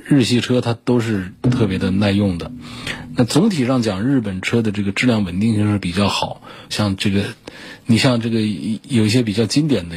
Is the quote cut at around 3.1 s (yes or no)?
no